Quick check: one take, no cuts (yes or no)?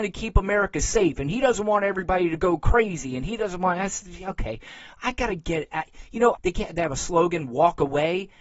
no